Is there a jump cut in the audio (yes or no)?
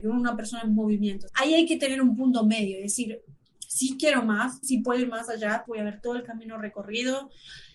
yes